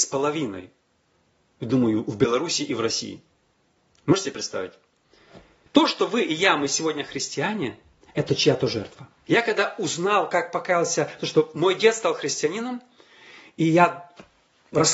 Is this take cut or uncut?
cut